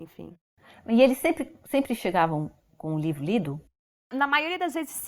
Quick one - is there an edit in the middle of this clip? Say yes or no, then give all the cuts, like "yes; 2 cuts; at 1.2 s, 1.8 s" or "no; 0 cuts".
no; 0 cuts